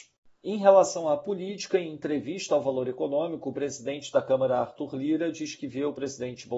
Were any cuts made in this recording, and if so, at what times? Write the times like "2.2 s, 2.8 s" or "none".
none